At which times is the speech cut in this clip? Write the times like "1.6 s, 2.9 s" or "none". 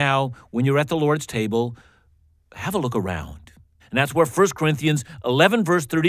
3.8 s